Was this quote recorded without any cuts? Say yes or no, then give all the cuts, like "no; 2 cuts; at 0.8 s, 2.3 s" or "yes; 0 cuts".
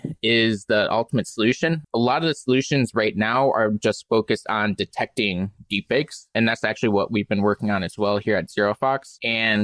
yes; 0 cuts